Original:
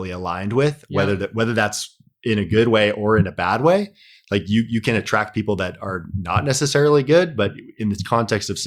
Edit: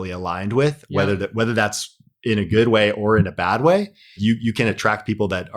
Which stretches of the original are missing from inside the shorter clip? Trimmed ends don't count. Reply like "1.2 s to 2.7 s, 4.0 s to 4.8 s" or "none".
4.2 s to 4.4 s